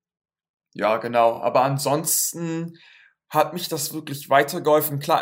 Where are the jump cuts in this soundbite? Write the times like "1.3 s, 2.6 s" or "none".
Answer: none